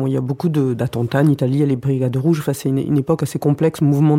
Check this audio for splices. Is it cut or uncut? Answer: uncut